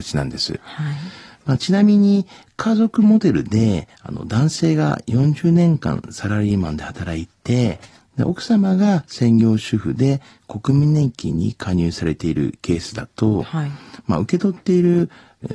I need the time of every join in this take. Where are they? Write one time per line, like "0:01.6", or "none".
none